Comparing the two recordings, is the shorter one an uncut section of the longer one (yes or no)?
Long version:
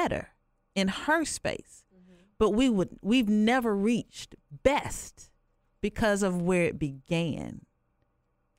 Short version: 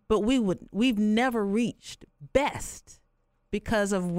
yes